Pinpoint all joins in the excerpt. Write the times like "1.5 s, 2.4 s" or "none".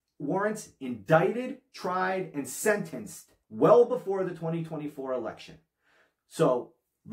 3.4 s

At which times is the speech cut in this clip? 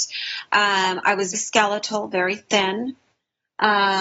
1.3 s

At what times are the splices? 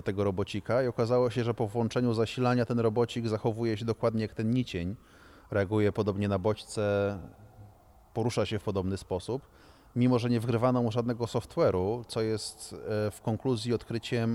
none

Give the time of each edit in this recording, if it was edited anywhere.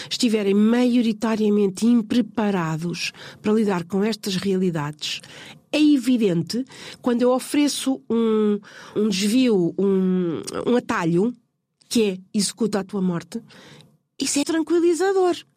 9.0 s, 14.4 s

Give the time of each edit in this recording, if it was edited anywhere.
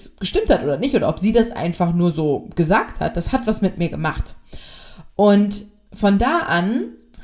none

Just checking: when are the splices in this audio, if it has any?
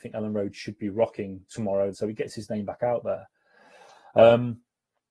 1.9 s

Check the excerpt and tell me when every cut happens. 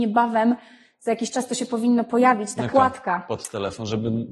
2.7 s

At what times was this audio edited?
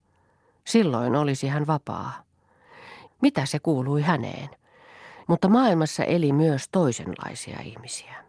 3.1 s, 5.2 s

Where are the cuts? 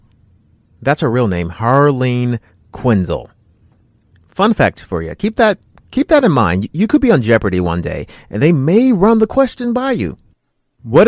none

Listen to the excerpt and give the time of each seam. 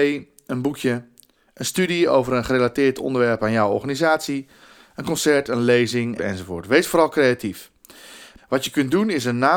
6.2 s, 8.4 s

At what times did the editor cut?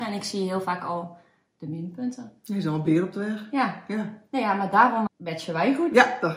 5.1 s

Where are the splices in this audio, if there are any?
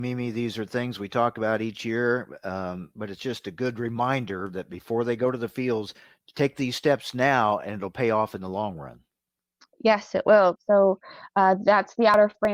10.6 s

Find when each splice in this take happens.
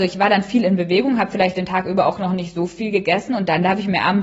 none

